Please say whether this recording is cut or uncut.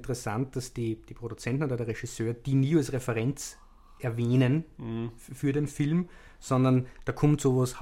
uncut